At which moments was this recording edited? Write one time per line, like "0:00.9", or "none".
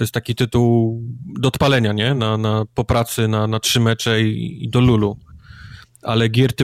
none